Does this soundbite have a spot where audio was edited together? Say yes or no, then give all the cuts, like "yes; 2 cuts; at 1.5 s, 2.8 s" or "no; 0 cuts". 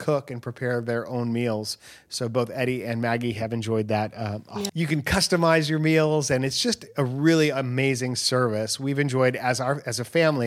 yes; 1 cut; at 4.7 s